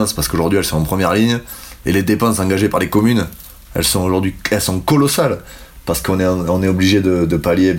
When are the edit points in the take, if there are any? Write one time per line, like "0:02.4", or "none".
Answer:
none

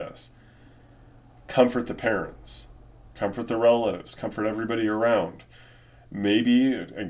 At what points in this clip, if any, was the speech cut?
none

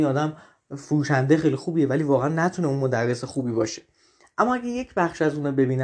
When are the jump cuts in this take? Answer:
none

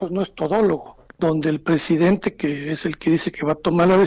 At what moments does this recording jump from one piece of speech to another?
0:01.1

